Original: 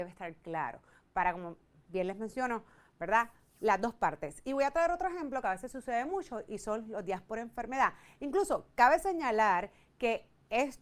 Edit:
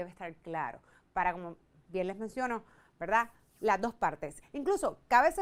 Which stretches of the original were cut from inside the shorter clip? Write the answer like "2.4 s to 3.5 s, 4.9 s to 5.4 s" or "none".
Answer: 4.4 s to 8.1 s